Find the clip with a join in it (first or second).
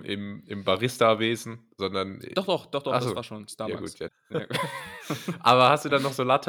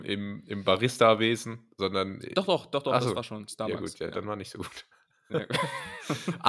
first